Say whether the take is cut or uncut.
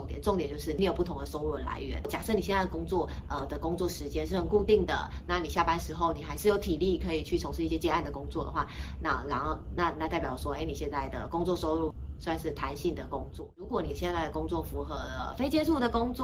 uncut